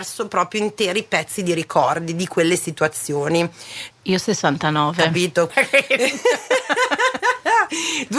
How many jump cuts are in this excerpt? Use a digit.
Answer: 2